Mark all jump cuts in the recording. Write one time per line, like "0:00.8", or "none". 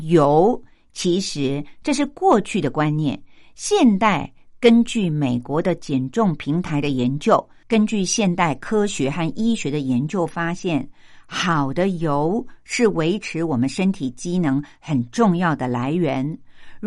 0:07.6